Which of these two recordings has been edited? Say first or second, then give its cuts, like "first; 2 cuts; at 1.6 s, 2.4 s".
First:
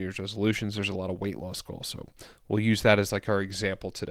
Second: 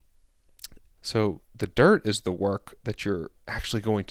second; 1 cut; at 1.0 s